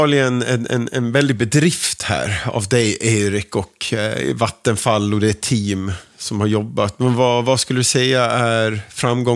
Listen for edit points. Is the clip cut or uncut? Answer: uncut